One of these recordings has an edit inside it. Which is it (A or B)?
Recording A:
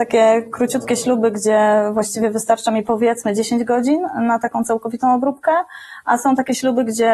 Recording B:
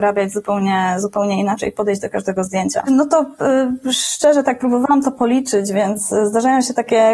B